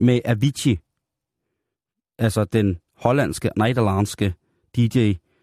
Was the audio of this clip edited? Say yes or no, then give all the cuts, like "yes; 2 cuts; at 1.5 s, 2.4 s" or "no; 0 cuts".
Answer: no; 0 cuts